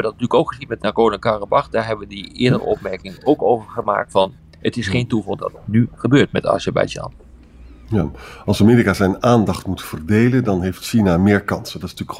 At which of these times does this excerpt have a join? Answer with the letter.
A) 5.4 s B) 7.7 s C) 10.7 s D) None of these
A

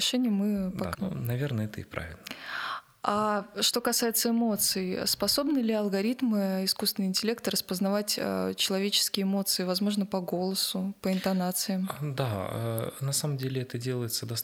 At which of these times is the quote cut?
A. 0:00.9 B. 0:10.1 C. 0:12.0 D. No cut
A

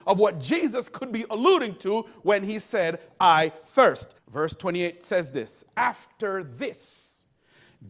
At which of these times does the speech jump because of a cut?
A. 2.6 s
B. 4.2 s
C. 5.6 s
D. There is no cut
B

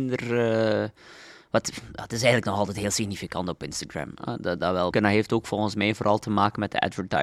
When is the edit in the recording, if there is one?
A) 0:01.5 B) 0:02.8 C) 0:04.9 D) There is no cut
C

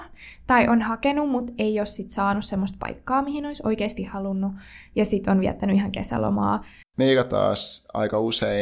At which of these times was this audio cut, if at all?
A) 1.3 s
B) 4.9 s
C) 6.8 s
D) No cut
C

